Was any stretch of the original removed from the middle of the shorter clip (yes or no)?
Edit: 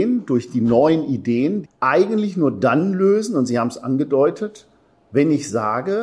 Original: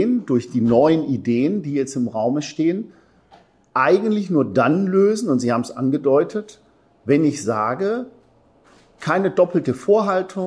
yes